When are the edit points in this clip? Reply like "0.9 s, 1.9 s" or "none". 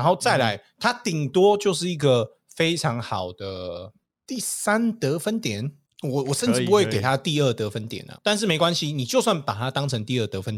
8.1 s